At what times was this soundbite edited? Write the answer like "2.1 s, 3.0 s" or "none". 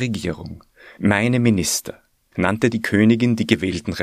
2.3 s